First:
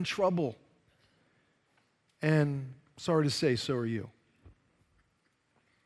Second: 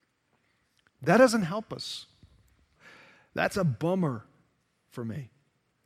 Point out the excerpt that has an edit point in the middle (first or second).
second